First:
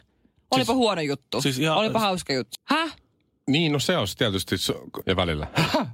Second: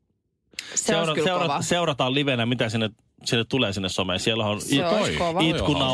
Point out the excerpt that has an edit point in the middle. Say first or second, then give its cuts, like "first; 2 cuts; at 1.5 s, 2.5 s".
first; 2 cuts; at 2.5 s, 5.0 s